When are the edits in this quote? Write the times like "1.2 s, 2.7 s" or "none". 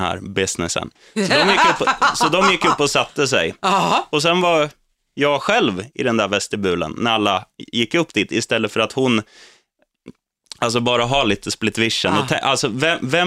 none